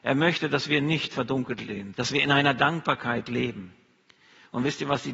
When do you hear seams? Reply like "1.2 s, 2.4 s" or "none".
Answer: 1.9 s